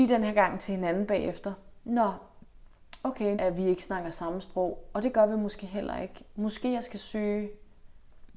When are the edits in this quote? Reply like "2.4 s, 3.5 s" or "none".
3.3 s